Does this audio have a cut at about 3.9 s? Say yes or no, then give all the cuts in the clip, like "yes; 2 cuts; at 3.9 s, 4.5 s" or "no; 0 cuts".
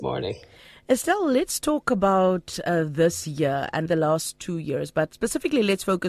yes; 1 cut; at 3.9 s